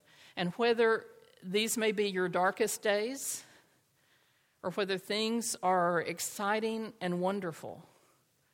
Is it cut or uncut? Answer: uncut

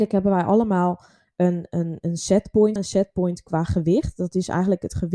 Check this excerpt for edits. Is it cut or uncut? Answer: cut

